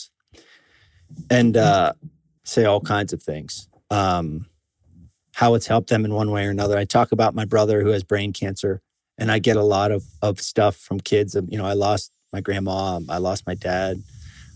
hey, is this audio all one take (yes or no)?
no